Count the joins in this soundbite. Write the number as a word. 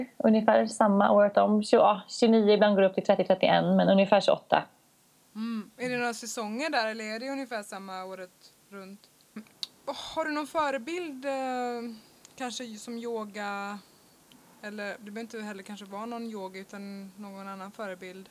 one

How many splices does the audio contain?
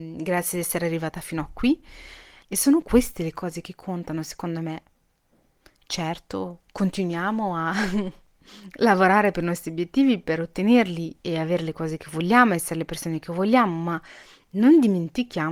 two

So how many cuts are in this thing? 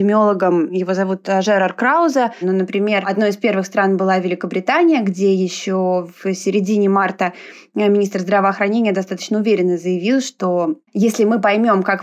one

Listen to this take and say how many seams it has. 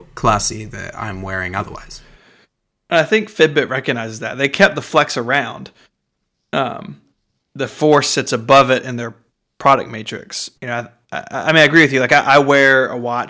one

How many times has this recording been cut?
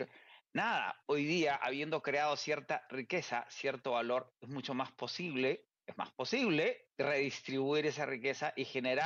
one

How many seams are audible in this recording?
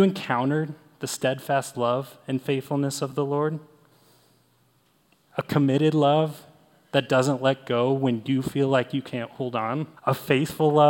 one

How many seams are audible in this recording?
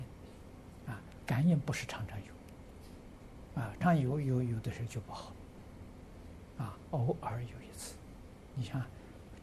two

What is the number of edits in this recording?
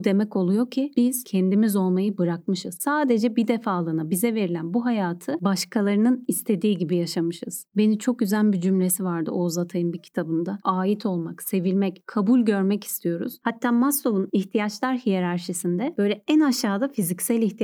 one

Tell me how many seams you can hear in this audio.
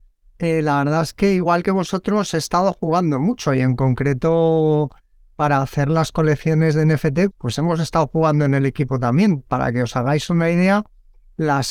one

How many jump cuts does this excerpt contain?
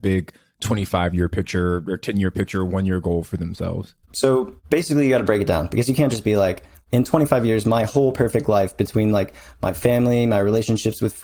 one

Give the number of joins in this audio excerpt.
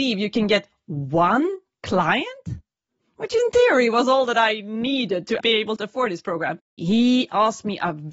two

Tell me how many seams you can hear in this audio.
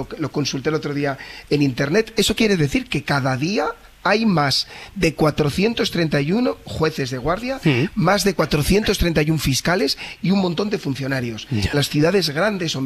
one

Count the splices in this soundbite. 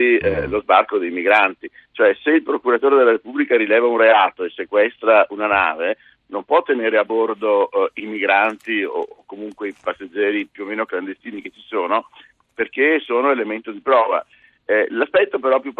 zero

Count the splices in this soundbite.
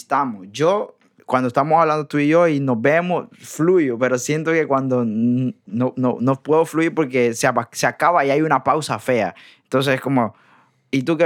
one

